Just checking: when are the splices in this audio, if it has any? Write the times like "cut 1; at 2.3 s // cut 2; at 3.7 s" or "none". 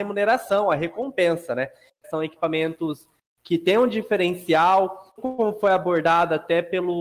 cut 1; at 2.0 s // cut 2; at 5.2 s